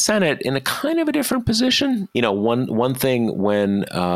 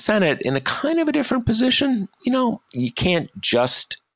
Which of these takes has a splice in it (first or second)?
first